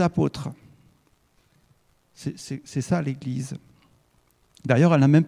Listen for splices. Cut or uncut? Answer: uncut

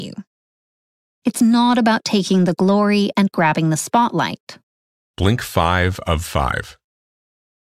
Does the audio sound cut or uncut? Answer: cut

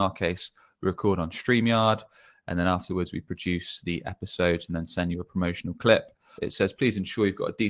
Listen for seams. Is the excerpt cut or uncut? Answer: cut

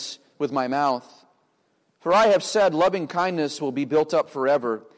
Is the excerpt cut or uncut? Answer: uncut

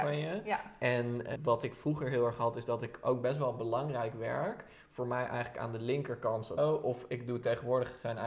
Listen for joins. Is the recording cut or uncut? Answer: cut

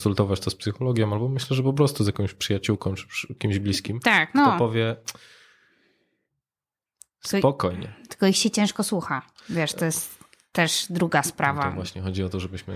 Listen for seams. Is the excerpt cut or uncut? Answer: uncut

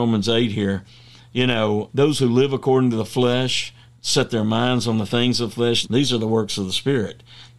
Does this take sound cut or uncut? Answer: cut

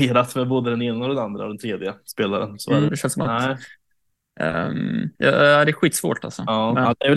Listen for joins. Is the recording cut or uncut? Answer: cut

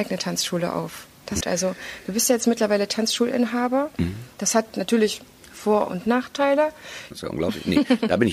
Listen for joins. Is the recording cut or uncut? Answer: cut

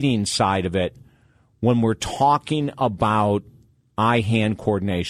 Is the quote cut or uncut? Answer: uncut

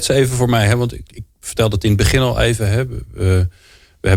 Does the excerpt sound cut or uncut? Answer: cut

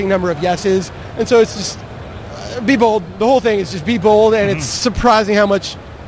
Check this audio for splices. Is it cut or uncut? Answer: uncut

